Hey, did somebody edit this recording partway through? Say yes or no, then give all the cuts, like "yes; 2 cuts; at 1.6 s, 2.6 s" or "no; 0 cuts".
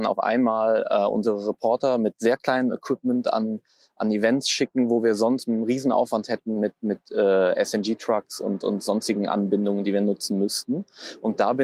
no; 0 cuts